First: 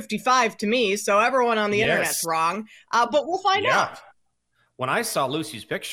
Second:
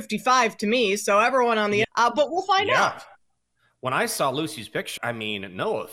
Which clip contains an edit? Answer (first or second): second